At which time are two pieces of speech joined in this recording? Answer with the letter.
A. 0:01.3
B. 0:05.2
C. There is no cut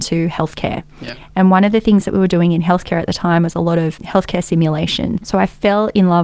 B